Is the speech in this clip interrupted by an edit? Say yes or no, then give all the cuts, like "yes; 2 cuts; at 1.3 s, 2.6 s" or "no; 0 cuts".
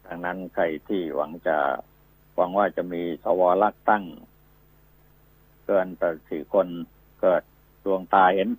no; 0 cuts